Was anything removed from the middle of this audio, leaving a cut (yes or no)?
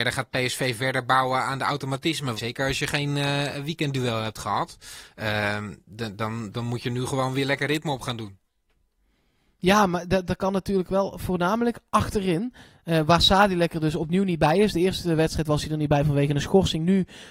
yes